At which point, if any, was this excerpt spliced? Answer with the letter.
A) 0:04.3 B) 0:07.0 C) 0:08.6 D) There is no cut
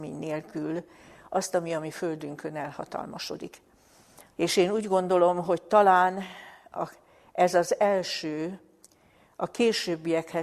A